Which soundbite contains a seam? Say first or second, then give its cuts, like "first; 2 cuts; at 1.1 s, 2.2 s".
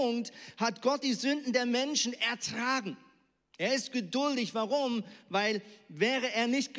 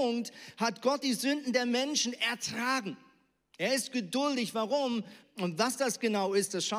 second; 1 cut; at 5.2 s